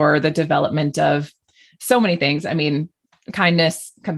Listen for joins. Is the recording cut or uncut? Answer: uncut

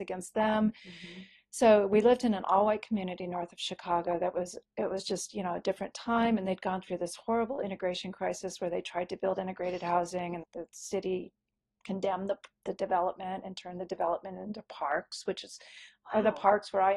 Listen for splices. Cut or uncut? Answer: cut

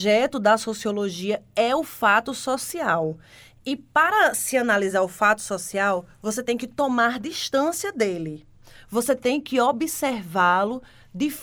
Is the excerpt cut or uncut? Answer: uncut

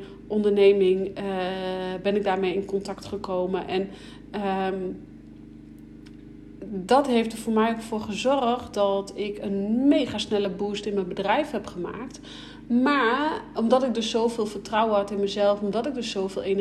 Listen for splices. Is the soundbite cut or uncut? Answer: uncut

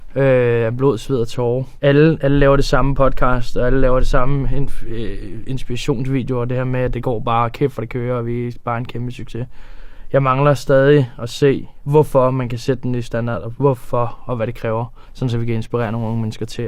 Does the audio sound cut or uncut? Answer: uncut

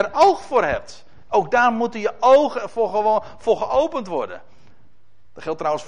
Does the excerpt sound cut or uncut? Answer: uncut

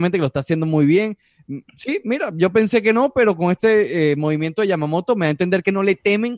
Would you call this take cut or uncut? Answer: uncut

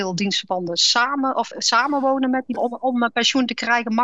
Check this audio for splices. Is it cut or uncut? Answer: cut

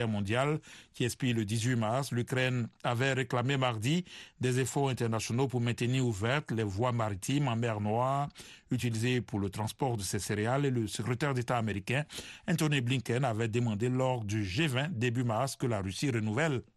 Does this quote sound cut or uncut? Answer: uncut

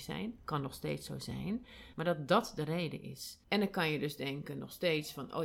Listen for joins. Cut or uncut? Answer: cut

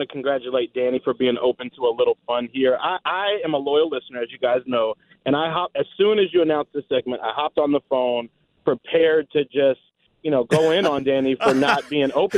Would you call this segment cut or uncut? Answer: uncut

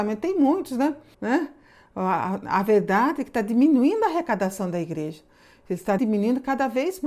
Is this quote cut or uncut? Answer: cut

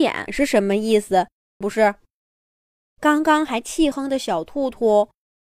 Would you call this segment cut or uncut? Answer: cut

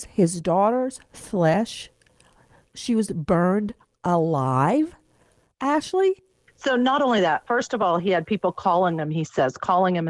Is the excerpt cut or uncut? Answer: uncut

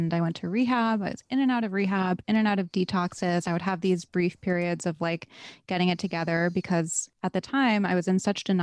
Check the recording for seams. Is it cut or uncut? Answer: uncut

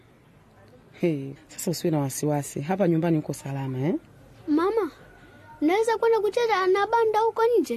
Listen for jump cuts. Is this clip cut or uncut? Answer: cut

